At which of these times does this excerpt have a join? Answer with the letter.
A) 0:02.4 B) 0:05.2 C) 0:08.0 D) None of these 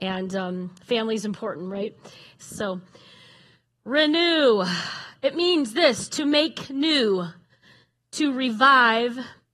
A